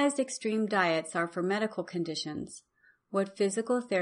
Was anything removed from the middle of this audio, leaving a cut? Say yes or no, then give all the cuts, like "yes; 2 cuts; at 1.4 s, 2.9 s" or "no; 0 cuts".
no; 0 cuts